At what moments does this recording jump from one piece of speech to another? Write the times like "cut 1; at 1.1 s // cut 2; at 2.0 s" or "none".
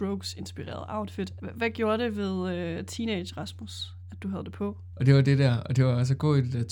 cut 1; at 1.4 s // cut 2; at 4.9 s